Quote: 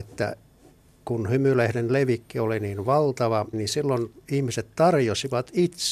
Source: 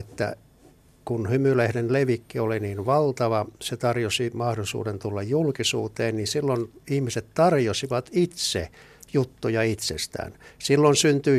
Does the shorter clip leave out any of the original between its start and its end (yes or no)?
yes